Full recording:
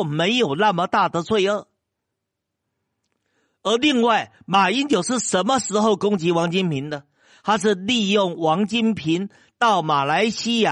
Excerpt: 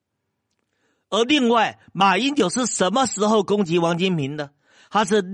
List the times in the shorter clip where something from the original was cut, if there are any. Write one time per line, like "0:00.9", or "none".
none